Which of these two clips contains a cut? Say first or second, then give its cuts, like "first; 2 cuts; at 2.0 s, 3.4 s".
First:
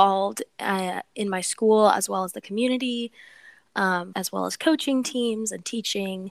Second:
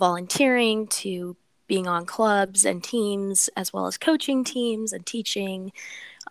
first; 1 cut; at 4.1 s